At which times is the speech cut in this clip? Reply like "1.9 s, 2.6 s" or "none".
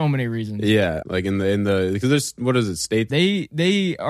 1.0 s, 3.1 s